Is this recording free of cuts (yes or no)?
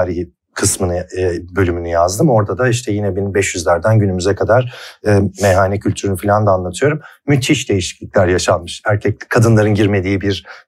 yes